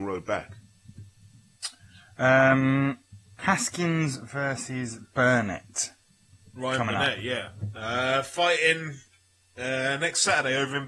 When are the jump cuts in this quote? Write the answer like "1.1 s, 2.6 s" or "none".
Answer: 3.4 s